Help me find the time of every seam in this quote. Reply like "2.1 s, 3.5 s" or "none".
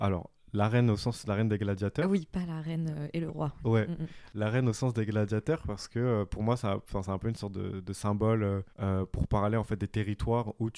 8.7 s